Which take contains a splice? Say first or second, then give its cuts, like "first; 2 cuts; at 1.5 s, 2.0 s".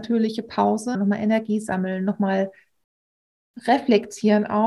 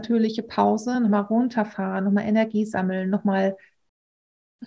first; 1 cut; at 0.9 s